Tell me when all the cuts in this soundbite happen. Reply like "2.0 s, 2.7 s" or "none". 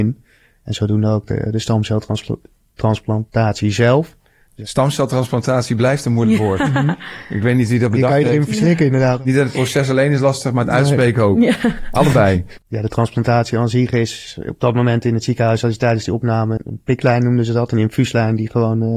12.6 s, 16.6 s